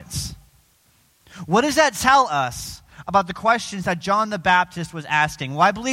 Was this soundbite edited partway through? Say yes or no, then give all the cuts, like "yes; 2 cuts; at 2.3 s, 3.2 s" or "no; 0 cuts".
no; 0 cuts